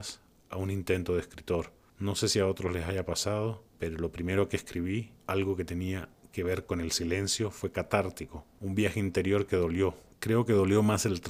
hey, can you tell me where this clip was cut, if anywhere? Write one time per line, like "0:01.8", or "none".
none